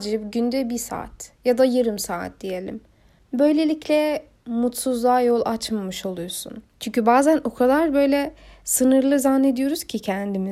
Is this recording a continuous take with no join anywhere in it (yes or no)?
yes